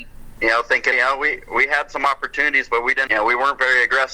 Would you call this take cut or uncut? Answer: cut